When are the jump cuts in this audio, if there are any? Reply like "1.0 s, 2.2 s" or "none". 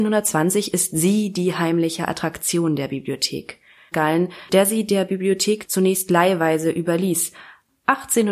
3.9 s

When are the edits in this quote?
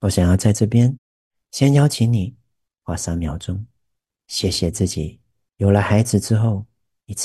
none

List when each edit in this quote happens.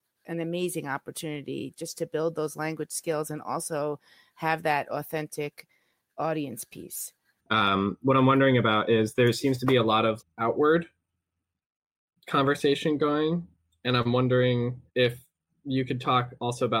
7.4 s, 10.2 s, 14.9 s

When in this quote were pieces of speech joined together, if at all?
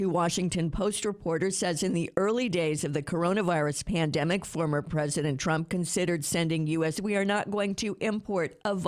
6.9 s

